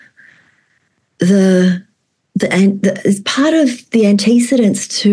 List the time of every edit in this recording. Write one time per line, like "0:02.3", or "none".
none